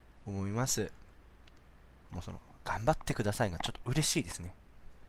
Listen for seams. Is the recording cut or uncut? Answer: cut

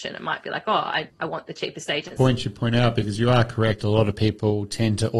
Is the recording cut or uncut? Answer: cut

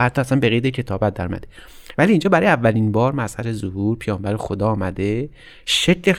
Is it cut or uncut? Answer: uncut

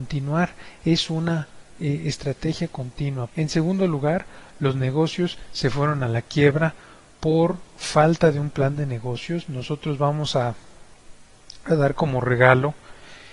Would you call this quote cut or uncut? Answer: cut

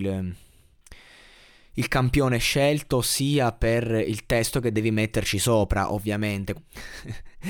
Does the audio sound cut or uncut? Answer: cut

